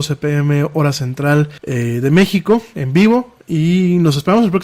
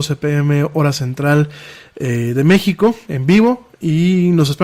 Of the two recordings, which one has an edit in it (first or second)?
first